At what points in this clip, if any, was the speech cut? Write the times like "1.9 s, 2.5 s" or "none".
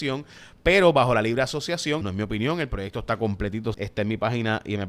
2.0 s, 3.7 s